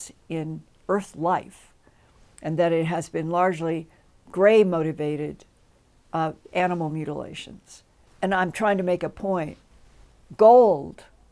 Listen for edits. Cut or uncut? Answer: cut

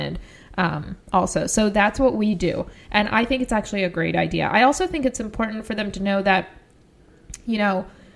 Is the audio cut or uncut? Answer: uncut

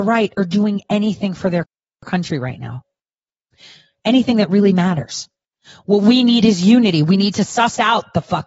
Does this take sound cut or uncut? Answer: uncut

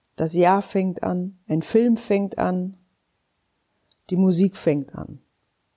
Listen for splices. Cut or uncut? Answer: cut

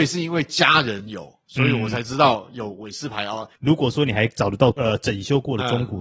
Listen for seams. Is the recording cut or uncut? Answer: cut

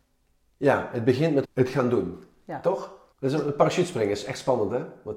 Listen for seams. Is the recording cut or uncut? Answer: cut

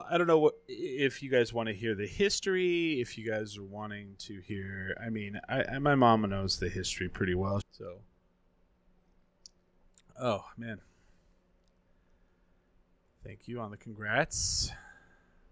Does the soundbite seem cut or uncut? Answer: cut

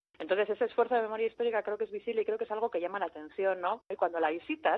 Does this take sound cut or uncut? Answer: cut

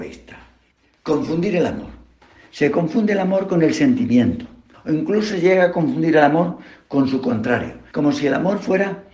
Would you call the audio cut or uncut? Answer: cut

